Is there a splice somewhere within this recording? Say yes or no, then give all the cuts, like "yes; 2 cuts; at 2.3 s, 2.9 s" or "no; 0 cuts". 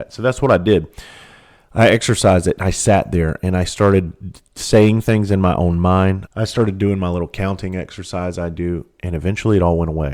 yes; 1 cut; at 6.3 s